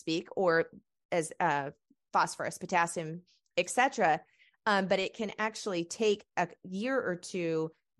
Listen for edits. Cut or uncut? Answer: uncut